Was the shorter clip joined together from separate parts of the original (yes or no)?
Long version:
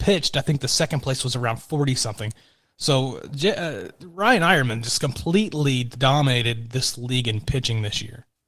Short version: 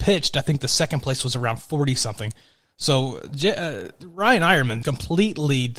yes